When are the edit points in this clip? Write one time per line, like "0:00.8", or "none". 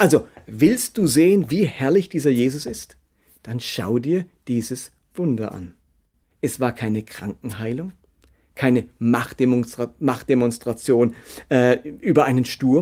0:06.2